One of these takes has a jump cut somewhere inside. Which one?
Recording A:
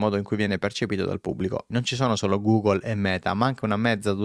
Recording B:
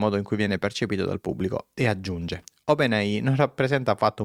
A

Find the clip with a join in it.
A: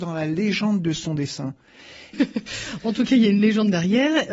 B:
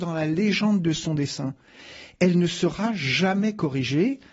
A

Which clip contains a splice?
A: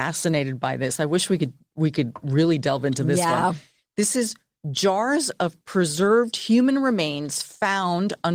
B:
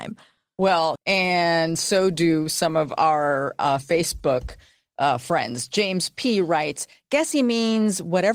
B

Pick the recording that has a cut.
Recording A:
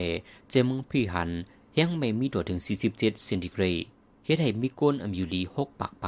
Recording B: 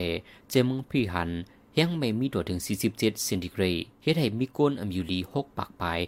B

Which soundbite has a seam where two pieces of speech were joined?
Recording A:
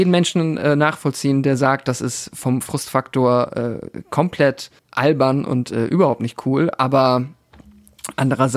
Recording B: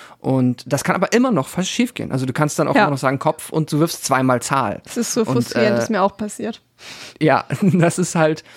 A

